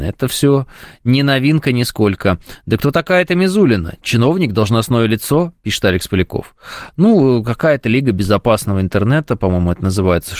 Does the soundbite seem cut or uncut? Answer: uncut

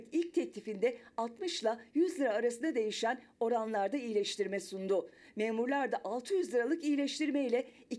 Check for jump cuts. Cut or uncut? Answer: uncut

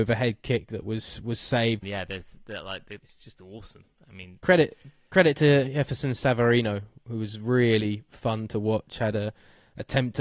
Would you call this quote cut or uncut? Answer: cut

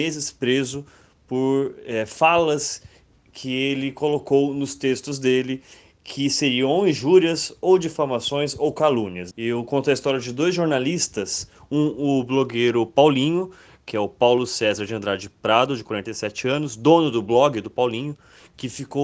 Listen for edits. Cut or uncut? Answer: cut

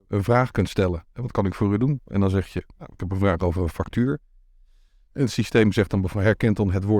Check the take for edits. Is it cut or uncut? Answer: uncut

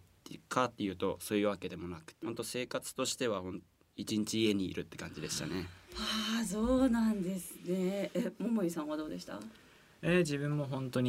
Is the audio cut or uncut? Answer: cut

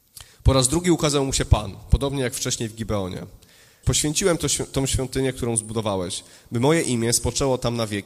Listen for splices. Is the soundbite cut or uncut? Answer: cut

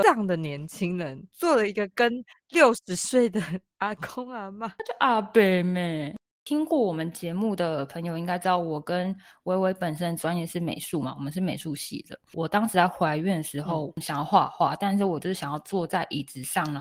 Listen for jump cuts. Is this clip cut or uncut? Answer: uncut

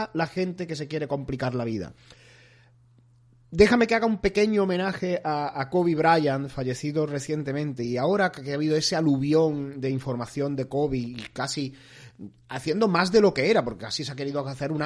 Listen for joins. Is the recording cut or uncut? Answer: uncut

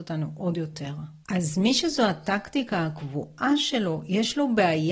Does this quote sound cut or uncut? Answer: cut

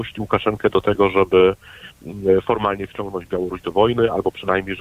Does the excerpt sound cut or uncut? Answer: uncut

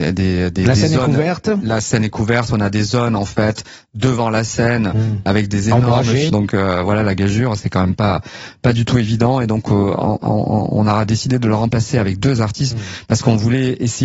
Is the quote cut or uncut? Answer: cut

